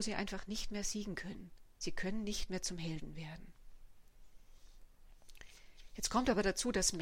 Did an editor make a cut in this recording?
no; 0 cuts

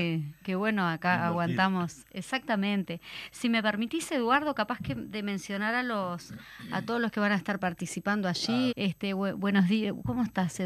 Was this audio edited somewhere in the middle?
yes; 1 cut; at 8.7 s

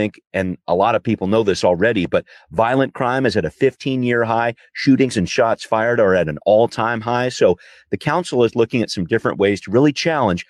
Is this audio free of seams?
yes; 0 cuts

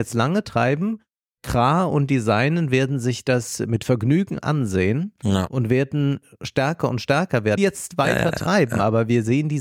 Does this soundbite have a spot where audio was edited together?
yes; 1 cut; at 7.6 s

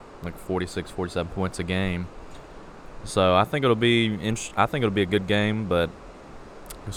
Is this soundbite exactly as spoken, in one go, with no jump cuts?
yes; 0 cuts

